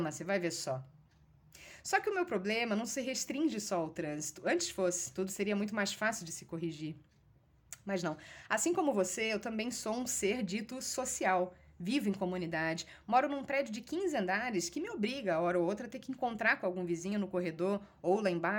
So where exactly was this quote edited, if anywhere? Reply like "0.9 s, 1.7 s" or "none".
none